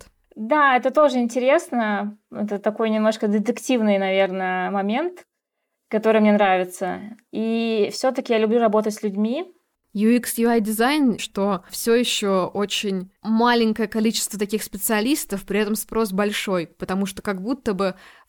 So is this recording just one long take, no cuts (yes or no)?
no